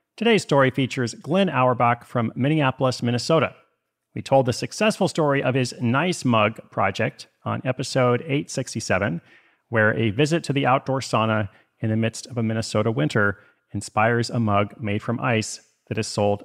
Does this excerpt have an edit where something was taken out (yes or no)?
no